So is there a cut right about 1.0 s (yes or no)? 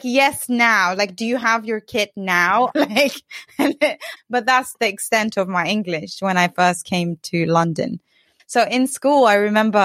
no